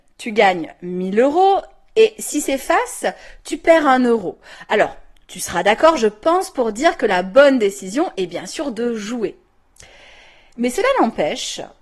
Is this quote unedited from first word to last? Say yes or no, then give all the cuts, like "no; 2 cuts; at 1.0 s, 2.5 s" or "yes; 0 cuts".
yes; 0 cuts